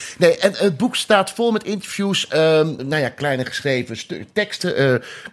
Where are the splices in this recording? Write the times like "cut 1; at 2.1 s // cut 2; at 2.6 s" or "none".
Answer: cut 1; at 2.8 s